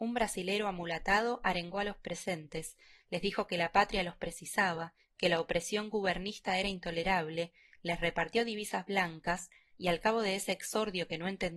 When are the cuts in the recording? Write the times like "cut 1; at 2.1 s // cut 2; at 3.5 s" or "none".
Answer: none